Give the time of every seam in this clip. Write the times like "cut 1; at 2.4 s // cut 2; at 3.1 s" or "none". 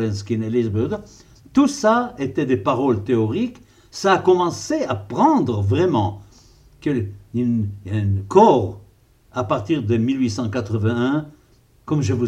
none